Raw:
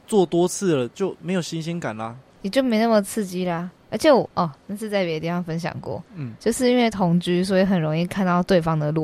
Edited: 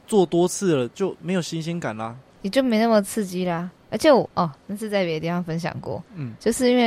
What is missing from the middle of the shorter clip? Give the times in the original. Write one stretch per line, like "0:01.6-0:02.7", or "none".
none